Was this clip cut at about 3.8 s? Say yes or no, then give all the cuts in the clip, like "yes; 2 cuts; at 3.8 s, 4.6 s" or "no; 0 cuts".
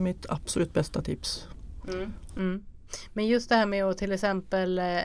no; 1 cut; at 2.3 s